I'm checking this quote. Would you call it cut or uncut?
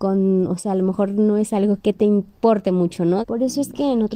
cut